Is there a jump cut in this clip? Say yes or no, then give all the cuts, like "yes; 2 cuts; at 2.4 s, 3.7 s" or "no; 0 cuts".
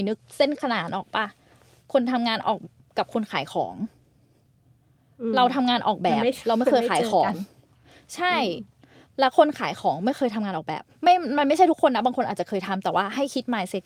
yes; 1 cut; at 2.6 s